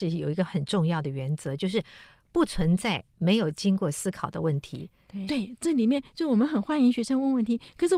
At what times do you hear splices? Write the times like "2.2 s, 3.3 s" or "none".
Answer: 5.3 s